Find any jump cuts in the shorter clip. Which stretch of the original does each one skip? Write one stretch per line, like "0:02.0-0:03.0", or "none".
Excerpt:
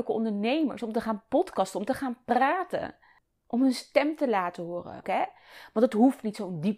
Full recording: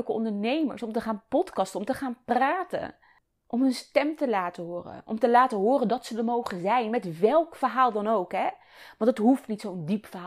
0:05.0-0:08.3

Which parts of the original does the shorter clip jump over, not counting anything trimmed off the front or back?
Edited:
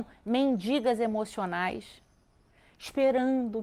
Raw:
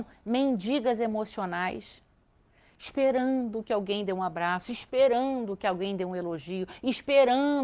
none

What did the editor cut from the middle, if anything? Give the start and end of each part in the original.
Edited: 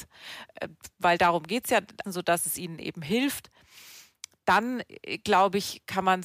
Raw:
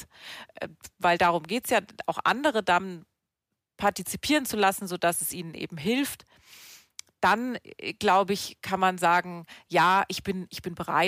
0:02.0-0:04.8

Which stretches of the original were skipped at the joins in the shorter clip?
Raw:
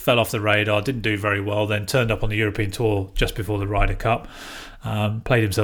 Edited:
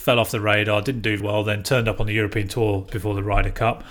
0:01.2-0:01.4
0:03.1-0:03.3

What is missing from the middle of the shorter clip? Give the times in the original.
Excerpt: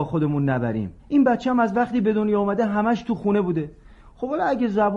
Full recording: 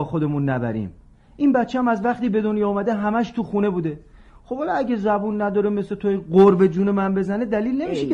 0:01.0-0:01.3

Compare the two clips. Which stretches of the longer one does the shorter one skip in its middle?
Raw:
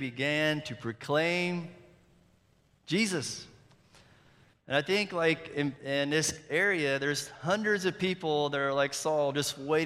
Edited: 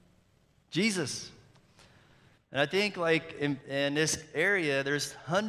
none

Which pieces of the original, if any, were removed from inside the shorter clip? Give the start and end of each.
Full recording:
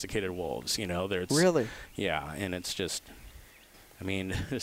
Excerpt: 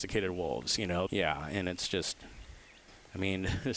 0:01.1-0:01.9

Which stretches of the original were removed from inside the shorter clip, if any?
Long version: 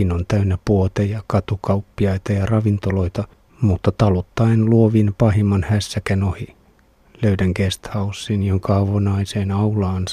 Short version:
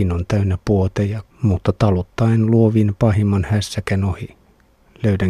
0:01.3-0:03.5

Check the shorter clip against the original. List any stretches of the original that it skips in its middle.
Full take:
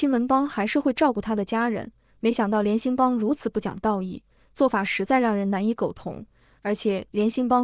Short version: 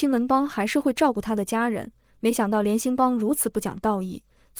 none

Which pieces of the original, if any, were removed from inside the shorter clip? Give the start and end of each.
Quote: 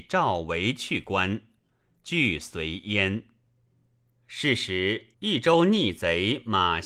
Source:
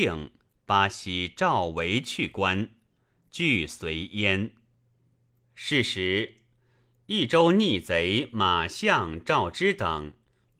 0:06.4-0:07.0

